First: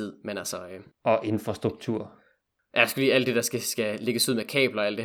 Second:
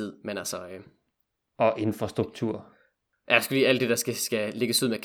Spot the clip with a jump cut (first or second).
first